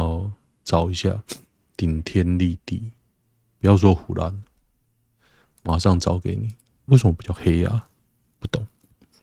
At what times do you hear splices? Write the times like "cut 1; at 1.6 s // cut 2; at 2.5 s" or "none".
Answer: cut 1; at 6.9 s